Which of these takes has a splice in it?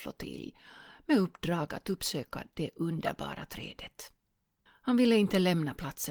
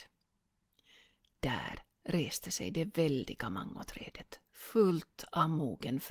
first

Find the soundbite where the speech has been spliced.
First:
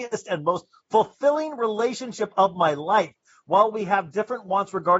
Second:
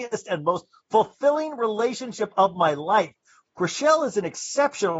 second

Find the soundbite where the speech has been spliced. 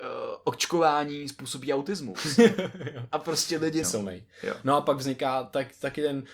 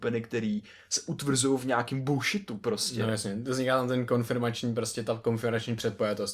first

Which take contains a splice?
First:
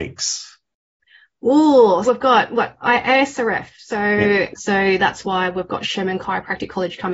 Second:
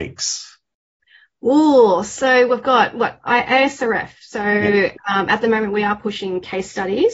first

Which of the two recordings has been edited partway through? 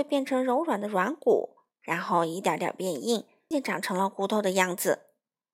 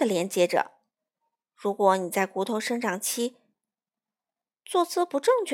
first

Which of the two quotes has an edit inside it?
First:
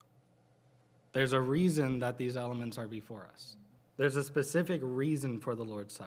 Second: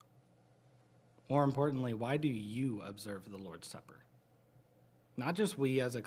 first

